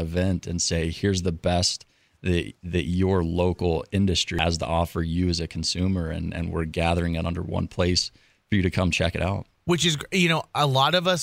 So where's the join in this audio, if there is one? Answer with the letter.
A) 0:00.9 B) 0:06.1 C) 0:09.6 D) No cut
D